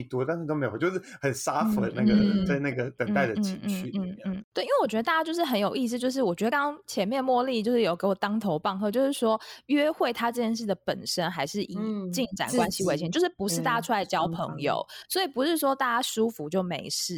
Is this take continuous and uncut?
yes; 0 cuts

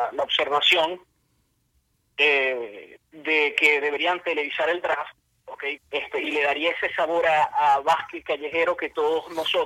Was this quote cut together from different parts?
yes; 1 cut; at 5.8 s

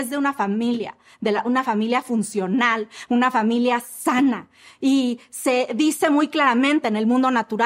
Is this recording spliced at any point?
no; 0 cuts

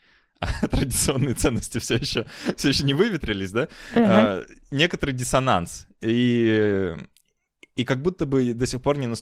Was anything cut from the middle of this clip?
no; 0 cuts

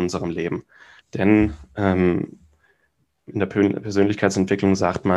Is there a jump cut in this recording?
yes; 1 cut; at 1.0 s

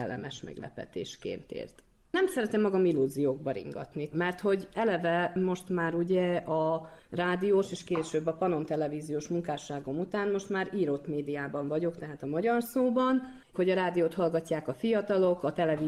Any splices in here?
yes; 2 cuts; at 4.1 s, 13.5 s

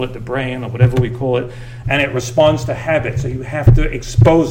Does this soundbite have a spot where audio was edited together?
yes; 1 cut; at 1.8 s

